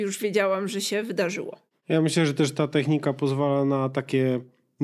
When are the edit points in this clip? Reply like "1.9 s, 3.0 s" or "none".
none